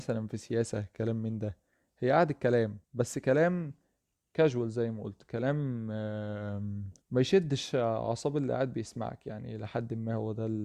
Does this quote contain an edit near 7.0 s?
yes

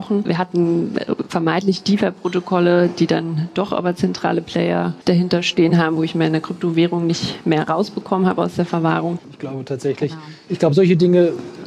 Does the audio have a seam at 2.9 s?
no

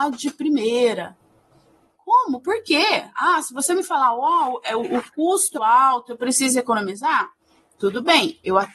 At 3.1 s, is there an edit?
no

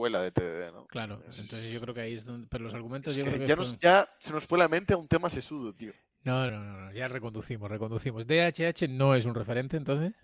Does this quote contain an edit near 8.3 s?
no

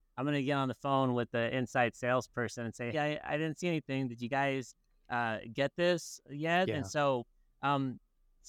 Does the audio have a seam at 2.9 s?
yes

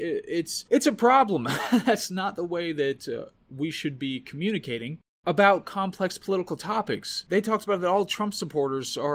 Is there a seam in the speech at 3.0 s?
no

